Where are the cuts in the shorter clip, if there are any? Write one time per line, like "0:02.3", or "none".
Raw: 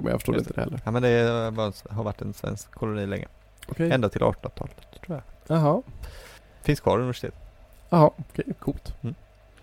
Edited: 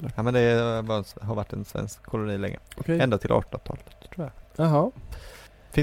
0:02.6